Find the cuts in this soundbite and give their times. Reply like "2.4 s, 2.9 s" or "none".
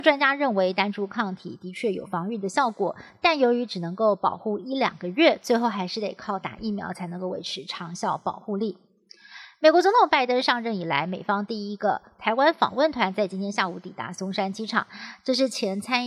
none